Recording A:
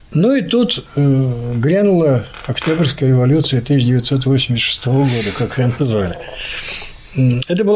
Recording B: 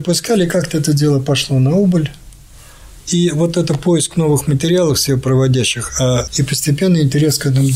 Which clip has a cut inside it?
B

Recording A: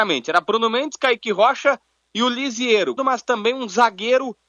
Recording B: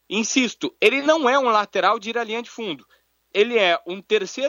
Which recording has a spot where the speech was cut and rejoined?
A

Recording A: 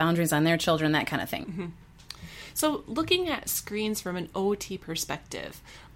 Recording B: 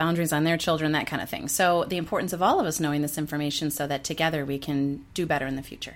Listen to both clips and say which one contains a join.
A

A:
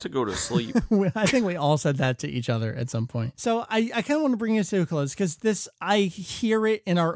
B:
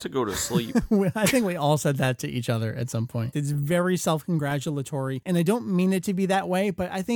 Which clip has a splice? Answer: B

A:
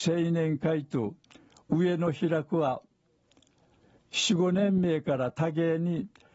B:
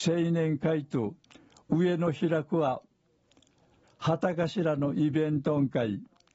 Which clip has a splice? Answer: B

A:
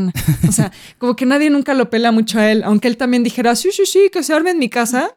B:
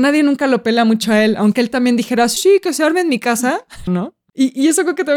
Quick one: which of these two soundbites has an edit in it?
B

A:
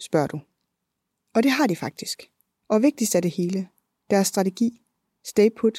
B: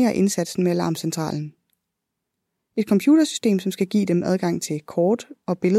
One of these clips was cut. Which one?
A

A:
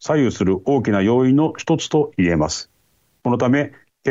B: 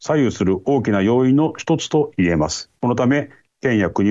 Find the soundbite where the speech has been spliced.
B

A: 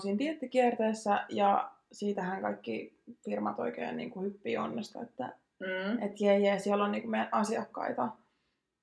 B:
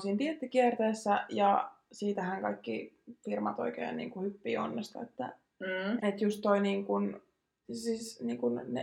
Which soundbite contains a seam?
B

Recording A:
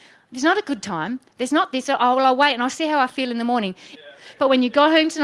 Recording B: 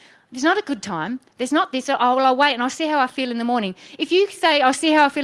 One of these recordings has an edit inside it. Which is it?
A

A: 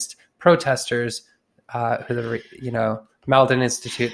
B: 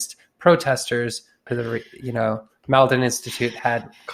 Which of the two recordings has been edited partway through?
B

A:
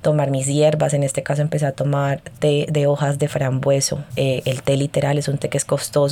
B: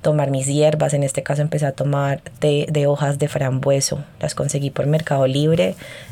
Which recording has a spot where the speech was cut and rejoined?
A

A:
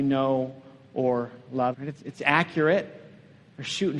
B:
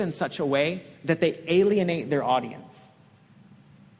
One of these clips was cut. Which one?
A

